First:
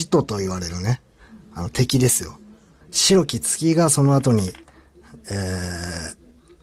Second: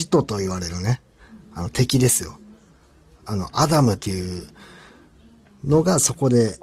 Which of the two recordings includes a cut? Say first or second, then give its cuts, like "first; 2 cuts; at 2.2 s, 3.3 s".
first; 1 cut; at 2.8 s